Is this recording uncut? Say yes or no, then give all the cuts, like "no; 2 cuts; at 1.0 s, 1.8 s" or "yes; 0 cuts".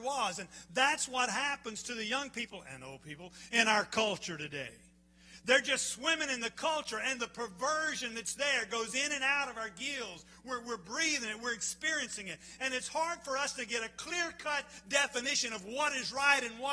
yes; 0 cuts